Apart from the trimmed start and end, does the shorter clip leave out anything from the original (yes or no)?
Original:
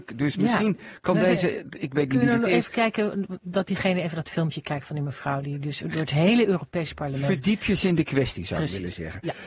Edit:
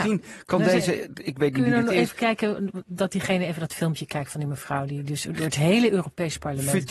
no